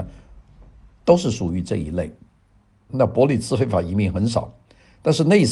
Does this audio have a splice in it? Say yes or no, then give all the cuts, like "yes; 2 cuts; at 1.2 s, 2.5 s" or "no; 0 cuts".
yes; 1 cut; at 2.9 s